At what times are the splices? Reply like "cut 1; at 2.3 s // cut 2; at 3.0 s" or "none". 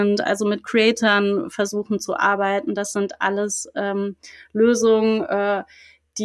none